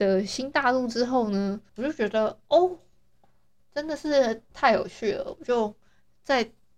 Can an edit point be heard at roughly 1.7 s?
yes; 1 cut; at 1.7 s

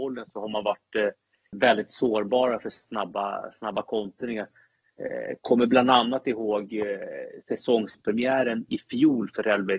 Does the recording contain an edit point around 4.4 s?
no; 1 cut; at 1.5 s

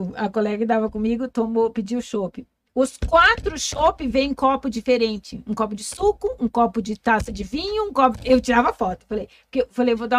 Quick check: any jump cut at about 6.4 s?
no; 0 cuts

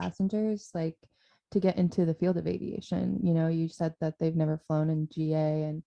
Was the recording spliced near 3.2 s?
no; 0 cuts

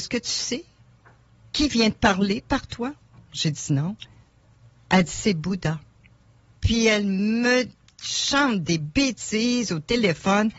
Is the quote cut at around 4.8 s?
no; 1 cut; at 6.6 s

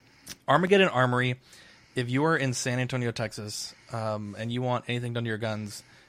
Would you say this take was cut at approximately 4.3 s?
no; 0 cuts

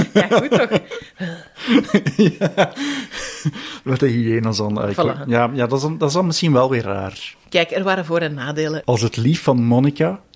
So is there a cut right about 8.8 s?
yes; 2 cuts; at 7.4 s, 8.8 s

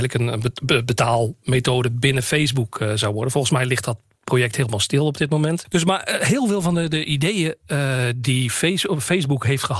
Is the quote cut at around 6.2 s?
no; 0 cuts

